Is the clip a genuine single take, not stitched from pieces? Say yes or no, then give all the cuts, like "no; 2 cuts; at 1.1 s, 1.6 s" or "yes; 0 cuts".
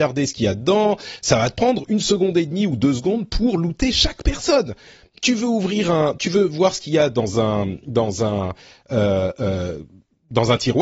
yes; 0 cuts